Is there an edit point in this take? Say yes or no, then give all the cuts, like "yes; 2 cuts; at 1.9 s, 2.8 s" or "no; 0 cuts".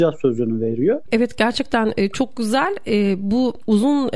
yes; 1 cut; at 1.1 s